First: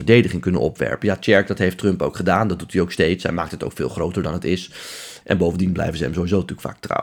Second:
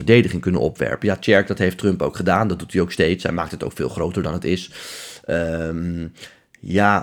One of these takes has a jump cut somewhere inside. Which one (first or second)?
first